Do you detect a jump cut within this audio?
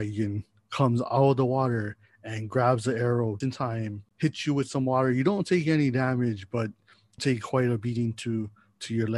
yes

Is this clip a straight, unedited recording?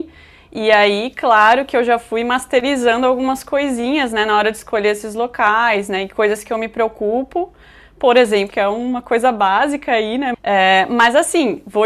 no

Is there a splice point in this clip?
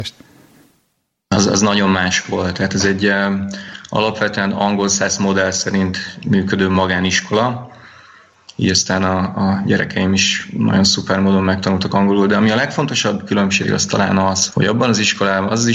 yes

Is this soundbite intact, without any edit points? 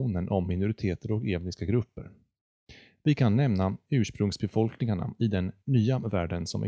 yes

